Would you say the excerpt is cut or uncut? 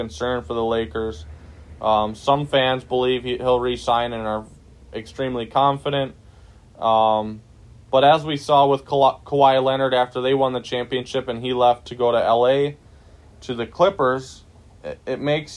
uncut